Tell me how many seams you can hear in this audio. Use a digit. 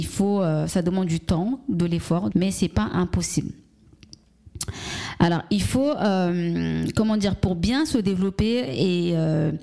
1